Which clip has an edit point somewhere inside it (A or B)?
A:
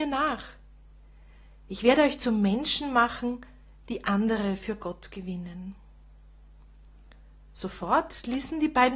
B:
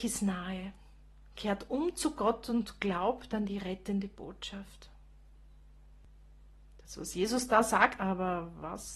B